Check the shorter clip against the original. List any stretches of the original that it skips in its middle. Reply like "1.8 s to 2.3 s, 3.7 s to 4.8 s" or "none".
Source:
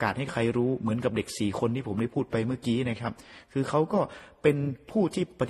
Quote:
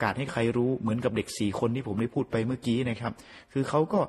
none